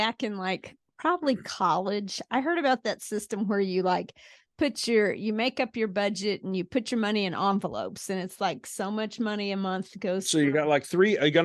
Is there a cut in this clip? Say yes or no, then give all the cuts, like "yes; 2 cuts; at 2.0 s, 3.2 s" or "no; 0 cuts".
no; 0 cuts